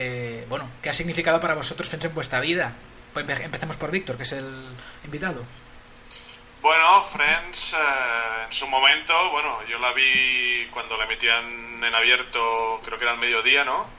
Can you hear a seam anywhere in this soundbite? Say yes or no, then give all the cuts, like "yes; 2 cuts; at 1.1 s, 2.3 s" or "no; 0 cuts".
no; 0 cuts